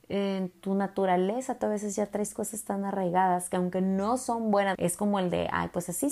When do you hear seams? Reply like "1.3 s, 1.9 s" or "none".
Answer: 1.6 s, 4.7 s